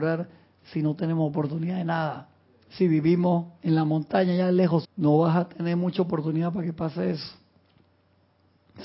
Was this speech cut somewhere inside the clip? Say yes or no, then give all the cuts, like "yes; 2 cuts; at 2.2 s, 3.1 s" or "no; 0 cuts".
yes; 1 cut; at 4.8 s